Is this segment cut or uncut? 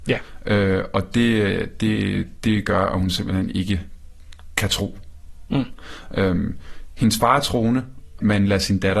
uncut